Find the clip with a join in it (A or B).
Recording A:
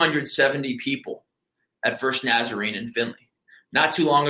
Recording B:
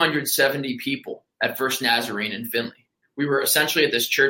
B